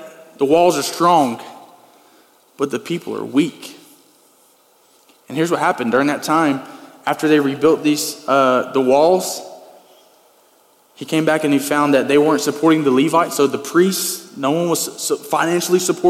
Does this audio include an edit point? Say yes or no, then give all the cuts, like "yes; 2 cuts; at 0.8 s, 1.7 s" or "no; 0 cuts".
no; 0 cuts